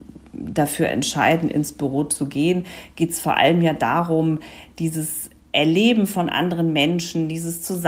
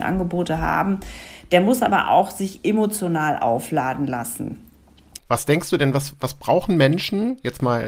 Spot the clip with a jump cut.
second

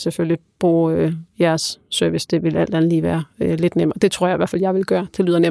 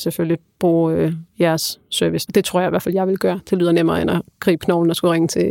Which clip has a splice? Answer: second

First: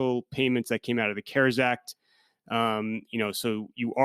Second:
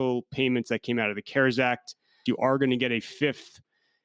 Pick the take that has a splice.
second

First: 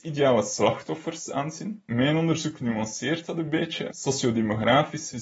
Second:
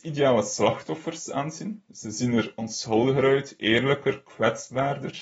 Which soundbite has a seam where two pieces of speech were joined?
first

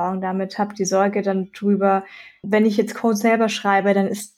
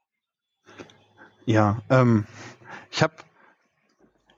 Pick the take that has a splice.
first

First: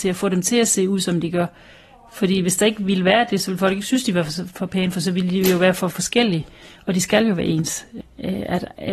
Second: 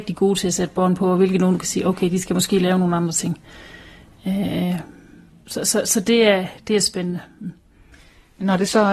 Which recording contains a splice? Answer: first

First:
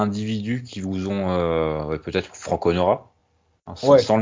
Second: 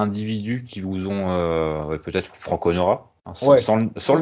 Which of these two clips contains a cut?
second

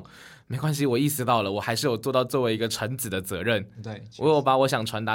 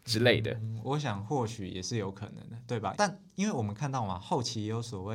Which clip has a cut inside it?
second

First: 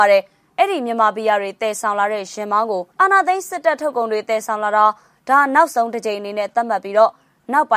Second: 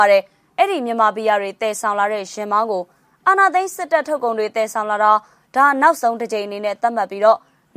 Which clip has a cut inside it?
first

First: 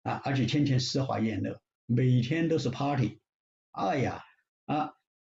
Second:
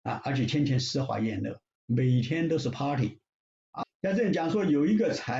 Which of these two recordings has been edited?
second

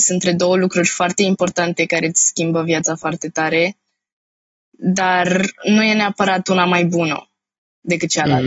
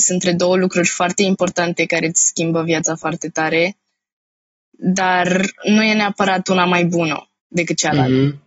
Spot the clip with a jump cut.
second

